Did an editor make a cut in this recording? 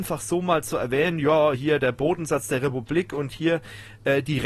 no; 0 cuts

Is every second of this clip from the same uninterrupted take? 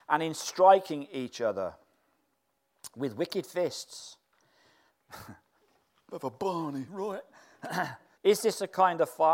no; 1 cut; at 8.1 s

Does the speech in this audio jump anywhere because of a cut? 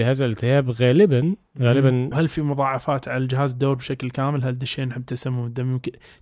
yes; 1 cut; at 2.1 s

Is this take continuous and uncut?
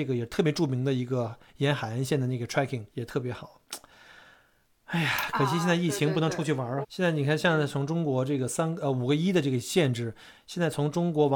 no; 2 cuts; at 2.9 s, 6.8 s

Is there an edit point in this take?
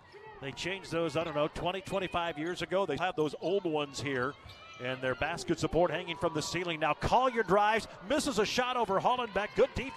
yes; 1 cut; at 3.0 s

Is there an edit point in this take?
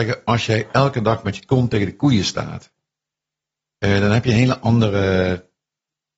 no; 0 cuts

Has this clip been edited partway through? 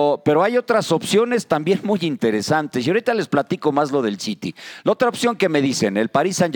no; 0 cuts

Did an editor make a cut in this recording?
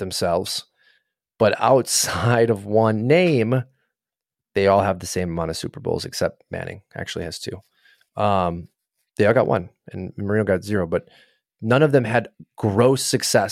no; 0 cuts

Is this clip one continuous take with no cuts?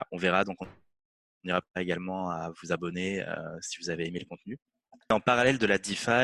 yes; 0 cuts

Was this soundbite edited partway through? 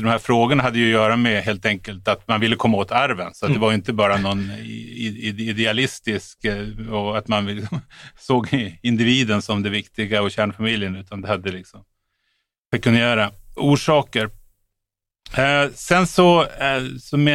yes; 1 cut; at 13.6 s

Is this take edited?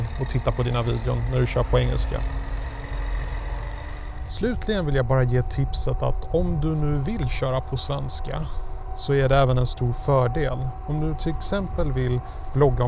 no; 0 cuts

